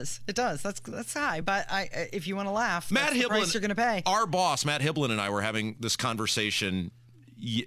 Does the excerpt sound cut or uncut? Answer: uncut